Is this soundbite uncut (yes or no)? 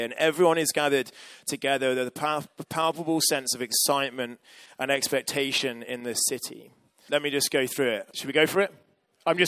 no